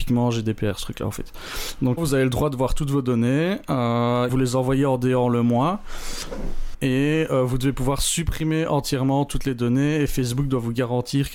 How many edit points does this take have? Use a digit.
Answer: 3